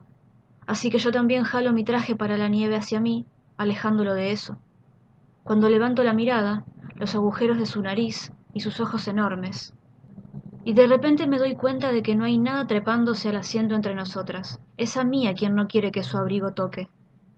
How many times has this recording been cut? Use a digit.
2